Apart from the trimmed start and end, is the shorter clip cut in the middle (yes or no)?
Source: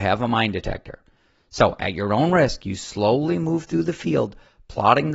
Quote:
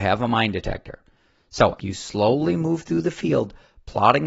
yes